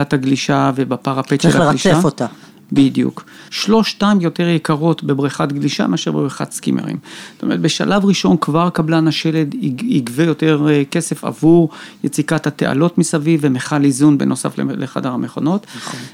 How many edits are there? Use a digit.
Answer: 1